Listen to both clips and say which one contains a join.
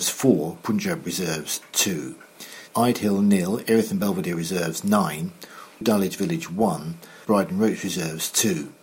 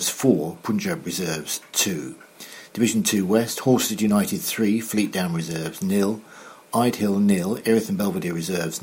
first; 3 cuts; at 2.7 s, 5.8 s, 7.2 s

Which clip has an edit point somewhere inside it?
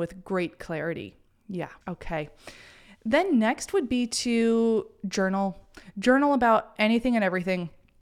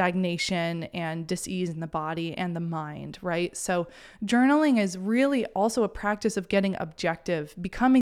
first; 1 cut; at 1.8 s

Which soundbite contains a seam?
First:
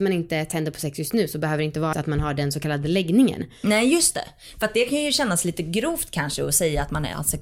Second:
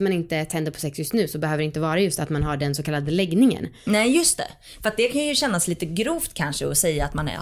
first; 1 cut; at 1.9 s

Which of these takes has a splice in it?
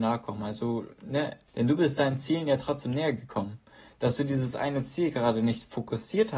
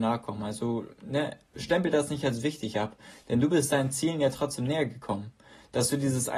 first; 1 cut; at 1.5 s

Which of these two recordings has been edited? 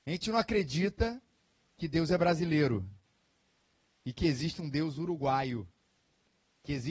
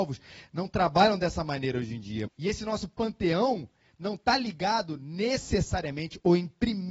second; 1 cut; at 2.3 s

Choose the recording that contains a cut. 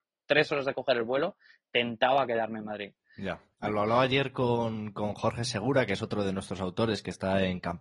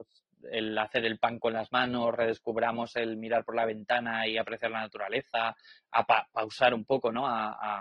first; 1 cut; at 3.5 s

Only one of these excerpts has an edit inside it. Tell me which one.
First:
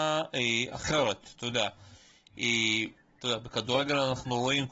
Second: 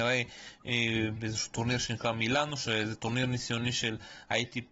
first; 1 cut; at 3.2 s

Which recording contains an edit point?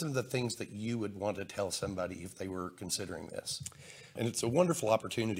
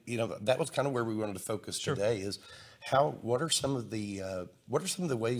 first; 1 cut; at 4.2 s

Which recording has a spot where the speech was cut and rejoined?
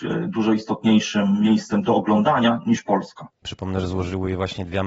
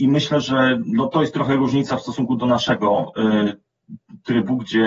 first; 1 cut; at 3.4 s

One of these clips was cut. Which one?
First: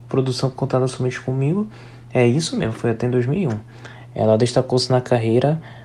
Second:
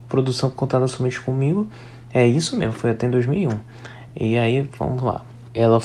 first; 1 cut; at 4.1 s

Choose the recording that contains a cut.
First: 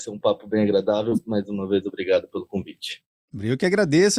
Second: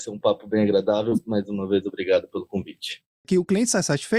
second; 1 cut; at 3.2 s

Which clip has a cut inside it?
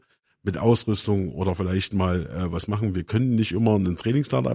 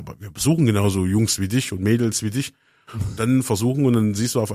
second; 1 cut; at 2.9 s

